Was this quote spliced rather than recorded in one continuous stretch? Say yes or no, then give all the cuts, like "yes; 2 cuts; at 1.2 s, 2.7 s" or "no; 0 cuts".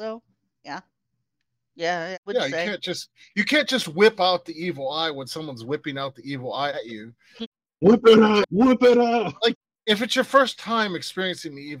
yes; 1 cut; at 8.4 s